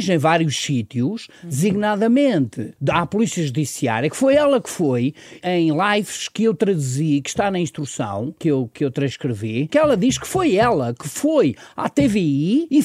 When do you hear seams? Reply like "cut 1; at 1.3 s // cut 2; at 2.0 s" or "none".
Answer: cut 1; at 5.4 s // cut 2; at 8.4 s // cut 3; at 9.7 s

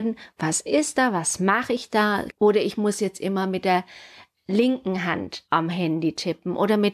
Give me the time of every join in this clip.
cut 1; at 2.3 s

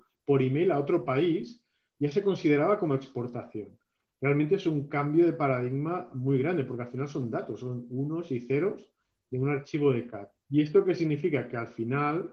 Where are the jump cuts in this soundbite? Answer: none

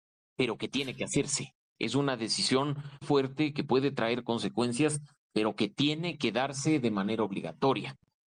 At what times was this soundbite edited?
cut 1; at 3.0 s

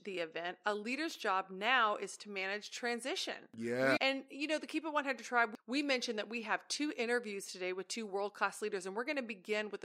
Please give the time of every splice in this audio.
cut 1; at 4.0 s

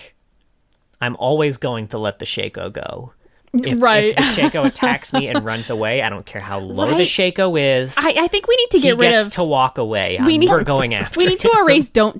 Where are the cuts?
cut 1; at 10.5 s

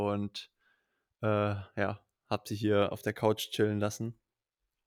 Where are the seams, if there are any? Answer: none

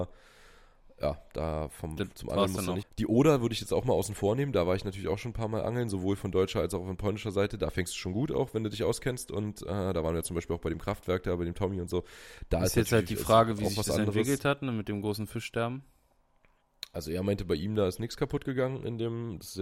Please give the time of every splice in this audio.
cut 1; at 2.8 s

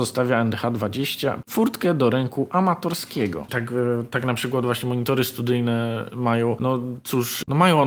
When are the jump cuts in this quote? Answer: cut 1; at 3.5 s

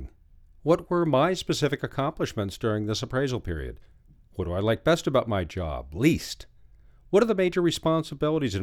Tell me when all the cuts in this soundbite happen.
none

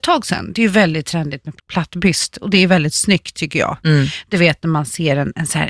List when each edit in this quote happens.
cut 1; at 1.6 s

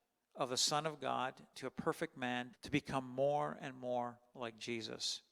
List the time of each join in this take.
cut 1; at 2.5 s

